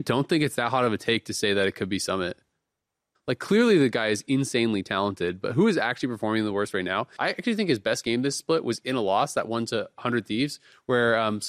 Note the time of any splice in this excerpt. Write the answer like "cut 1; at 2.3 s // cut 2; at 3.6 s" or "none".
cut 1; at 3.1 s // cut 2; at 7.2 s

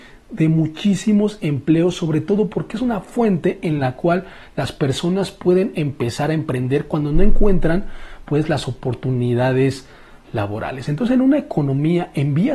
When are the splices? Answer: none

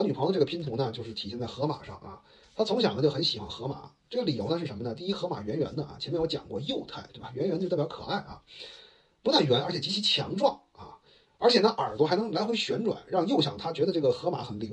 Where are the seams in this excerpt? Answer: none

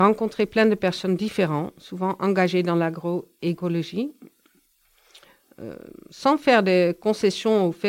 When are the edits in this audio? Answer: none

